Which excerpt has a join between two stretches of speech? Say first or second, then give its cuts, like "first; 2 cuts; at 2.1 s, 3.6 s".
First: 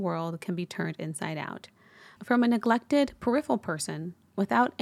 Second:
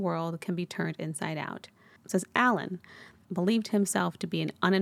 second; 2 cuts; at 2.0 s, 3.2 s